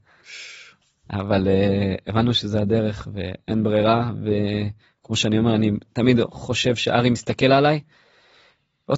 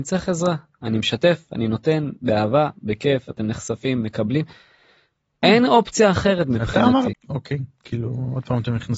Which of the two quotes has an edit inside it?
second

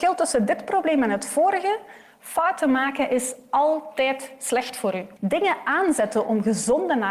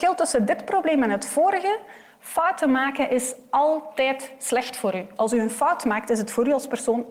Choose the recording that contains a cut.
first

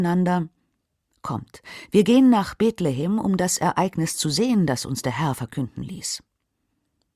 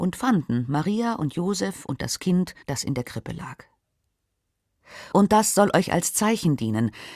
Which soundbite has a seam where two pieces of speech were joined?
second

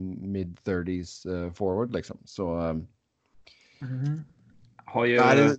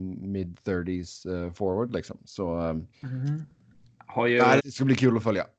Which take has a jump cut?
second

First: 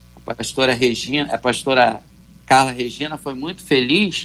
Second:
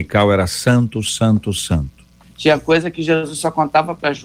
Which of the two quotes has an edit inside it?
second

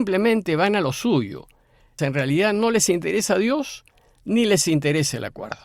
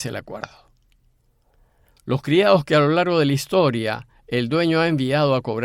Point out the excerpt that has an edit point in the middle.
first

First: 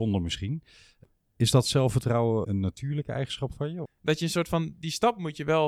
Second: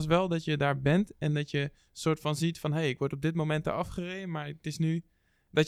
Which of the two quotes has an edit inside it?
first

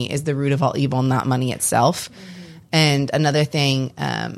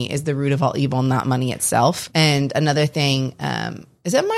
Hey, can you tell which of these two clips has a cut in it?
second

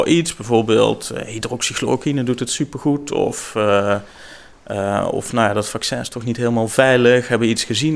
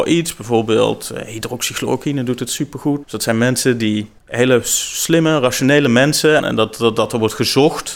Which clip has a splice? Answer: second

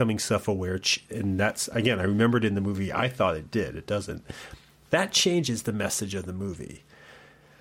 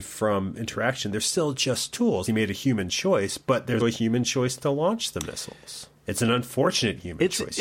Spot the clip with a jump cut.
second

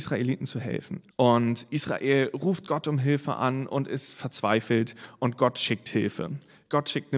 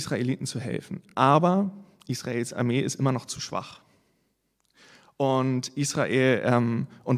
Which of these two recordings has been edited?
first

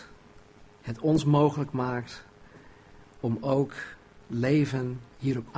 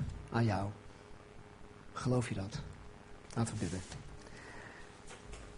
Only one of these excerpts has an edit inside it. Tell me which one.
second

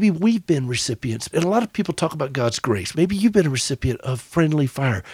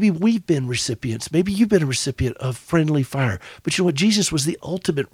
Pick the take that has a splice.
first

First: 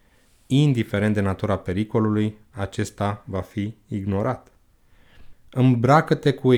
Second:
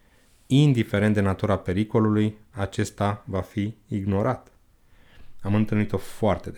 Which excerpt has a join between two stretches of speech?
first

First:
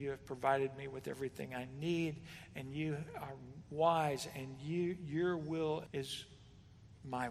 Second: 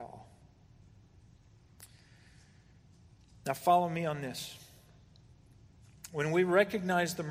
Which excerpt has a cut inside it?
first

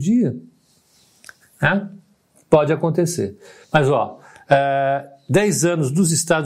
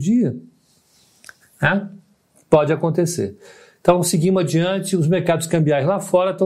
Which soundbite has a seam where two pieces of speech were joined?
first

